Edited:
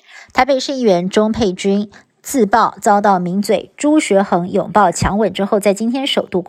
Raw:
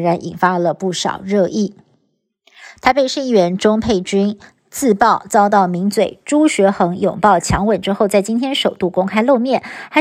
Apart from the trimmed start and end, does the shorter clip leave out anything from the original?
no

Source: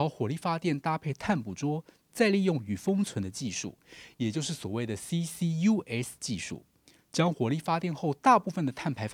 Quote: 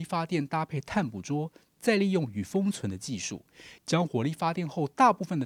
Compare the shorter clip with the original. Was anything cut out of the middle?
yes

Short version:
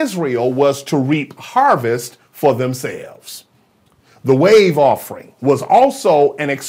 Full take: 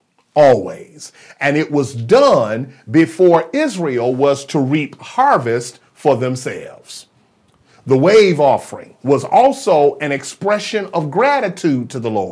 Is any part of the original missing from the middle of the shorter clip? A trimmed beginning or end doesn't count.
no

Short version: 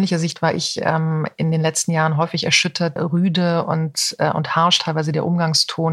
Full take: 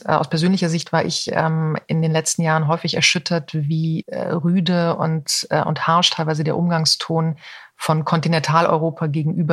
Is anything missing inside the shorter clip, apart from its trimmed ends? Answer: yes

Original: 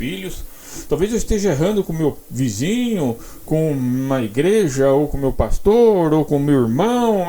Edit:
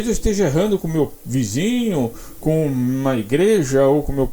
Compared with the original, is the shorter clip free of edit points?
yes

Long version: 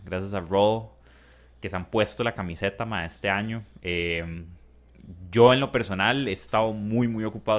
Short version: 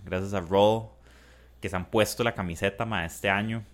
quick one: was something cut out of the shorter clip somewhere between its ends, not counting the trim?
no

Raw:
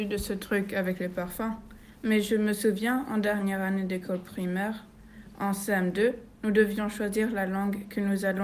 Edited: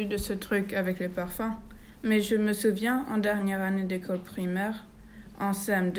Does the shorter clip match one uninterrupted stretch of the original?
yes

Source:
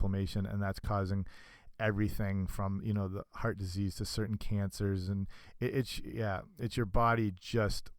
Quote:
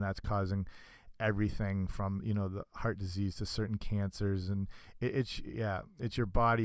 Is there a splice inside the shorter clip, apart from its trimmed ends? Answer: no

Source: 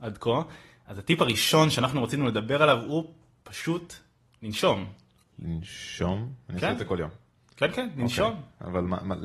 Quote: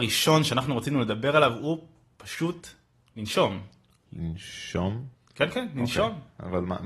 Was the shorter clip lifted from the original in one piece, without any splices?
no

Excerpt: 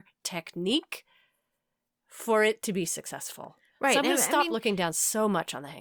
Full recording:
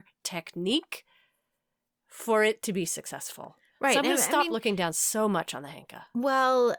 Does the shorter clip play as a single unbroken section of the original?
yes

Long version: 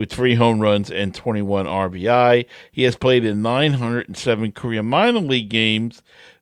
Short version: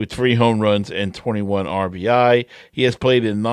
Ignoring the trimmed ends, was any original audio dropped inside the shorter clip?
no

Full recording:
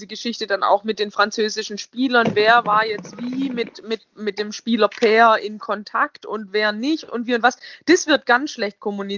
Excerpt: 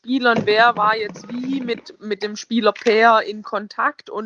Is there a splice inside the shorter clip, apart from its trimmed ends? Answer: yes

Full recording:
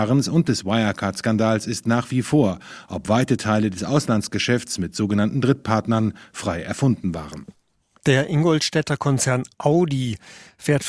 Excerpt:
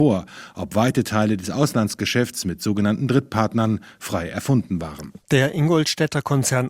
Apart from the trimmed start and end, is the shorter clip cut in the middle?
yes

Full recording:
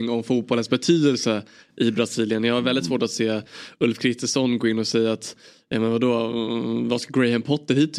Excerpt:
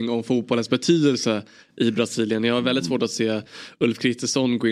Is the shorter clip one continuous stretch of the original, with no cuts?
yes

